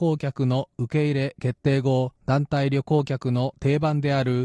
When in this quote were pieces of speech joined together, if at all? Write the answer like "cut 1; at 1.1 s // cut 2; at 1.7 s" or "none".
cut 1; at 2.2 s